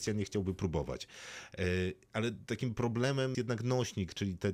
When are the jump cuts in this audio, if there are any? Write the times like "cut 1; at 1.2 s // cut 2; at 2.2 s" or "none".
cut 1; at 3.3 s